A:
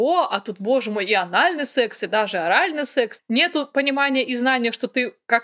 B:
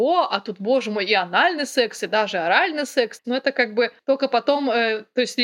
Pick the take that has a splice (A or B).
B